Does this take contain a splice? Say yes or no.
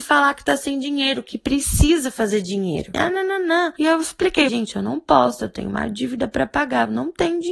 yes